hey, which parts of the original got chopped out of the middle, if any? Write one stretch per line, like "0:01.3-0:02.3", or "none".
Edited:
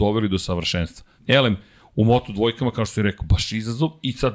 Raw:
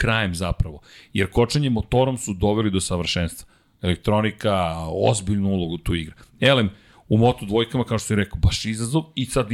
0:03.6-0:06.3